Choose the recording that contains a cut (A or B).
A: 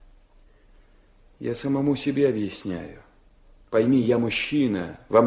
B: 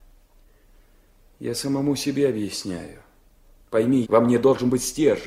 B